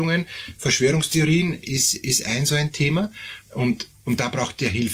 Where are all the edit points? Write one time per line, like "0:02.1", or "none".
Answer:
0:03.4